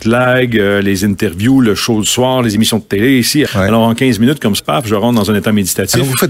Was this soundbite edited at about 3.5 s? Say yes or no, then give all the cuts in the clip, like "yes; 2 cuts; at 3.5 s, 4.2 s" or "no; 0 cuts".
yes; 2 cuts; at 3.5 s, 4.6 s